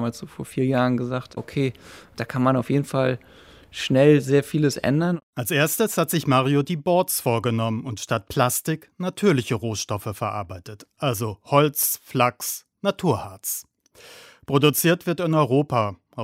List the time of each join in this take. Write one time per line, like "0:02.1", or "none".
none